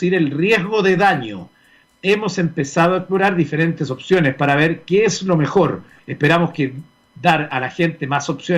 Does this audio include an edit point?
yes; 1 cut; at 6.0 s

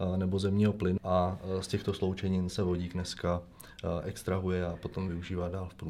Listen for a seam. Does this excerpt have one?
yes; 2 cuts; at 1.0 s, 2.5 s

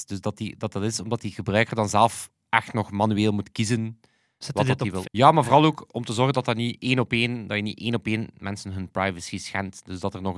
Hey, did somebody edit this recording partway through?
yes; 1 cut; at 5.0 s

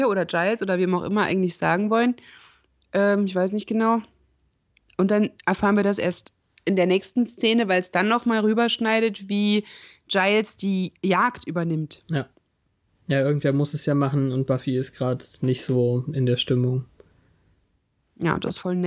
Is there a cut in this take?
no; 0 cuts

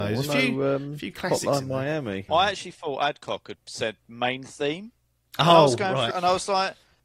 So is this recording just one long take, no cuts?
no; 2 cuts; at 2.3 s, 6.1 s

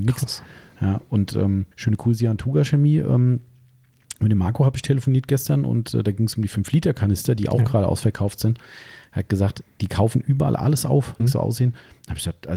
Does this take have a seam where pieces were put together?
yes; 2 cuts; at 1.7 s, 11.2 s

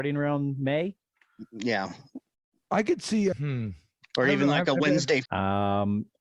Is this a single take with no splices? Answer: no; 2 cuts; at 3.3 s, 5.3 s

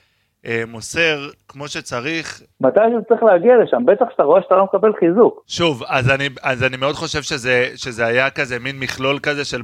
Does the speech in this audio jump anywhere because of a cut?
yes; 1 cut; at 2.5 s

